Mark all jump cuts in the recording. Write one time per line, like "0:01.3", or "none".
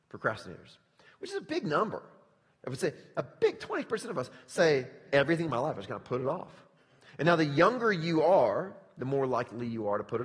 0:05.1